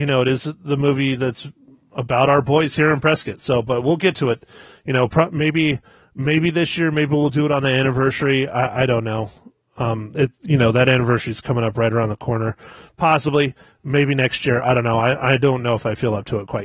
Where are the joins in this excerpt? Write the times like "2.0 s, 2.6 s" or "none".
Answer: none